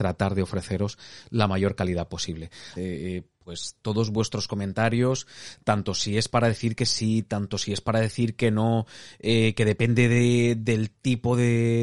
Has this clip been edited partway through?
yes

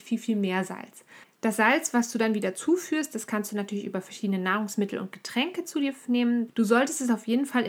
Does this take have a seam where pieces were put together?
yes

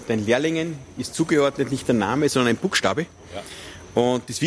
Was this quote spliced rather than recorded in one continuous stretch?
no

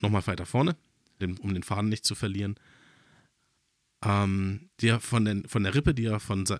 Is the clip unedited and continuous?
no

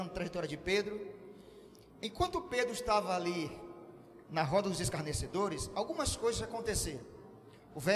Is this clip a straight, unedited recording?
yes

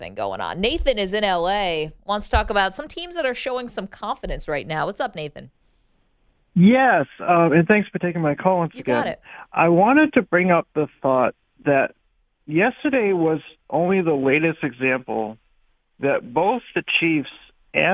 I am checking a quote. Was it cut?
no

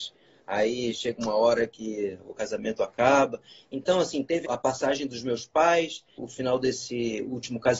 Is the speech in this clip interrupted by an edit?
yes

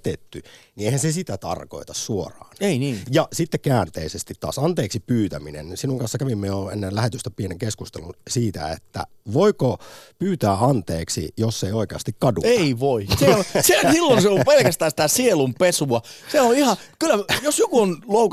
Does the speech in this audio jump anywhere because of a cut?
yes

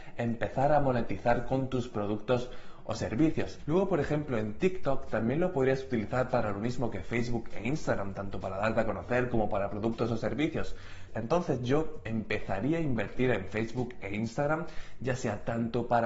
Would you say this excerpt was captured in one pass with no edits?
no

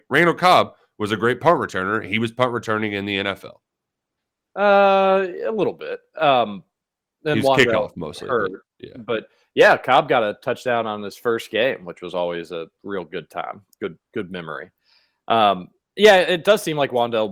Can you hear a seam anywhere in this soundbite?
no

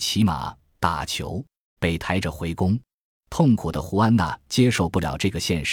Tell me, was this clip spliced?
yes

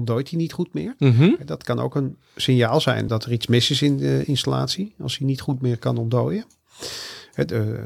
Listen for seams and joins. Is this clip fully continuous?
no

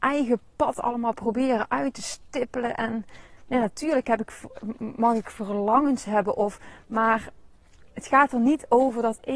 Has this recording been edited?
no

